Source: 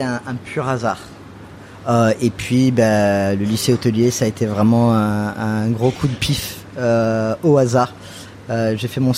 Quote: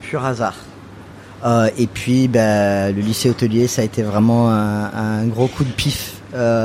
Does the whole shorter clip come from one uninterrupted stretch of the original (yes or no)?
yes